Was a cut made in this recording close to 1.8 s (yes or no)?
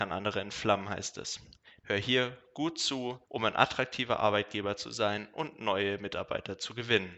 yes